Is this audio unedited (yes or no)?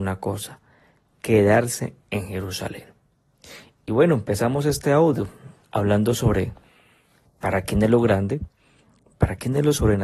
yes